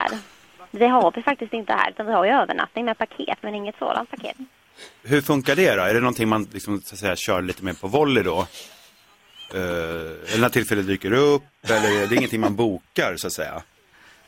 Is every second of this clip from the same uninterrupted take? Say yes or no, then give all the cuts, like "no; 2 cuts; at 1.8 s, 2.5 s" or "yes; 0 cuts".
yes; 0 cuts